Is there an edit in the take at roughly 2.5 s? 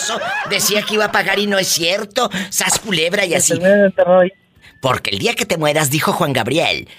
no; 1 cut; at 4.6 s

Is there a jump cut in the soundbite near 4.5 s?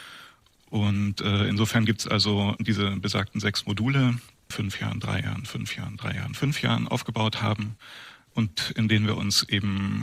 yes; 1 cut; at 4.5 s

